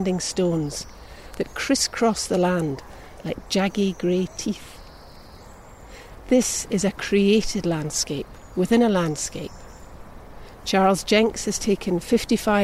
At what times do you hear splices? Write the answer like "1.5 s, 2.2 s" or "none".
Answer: none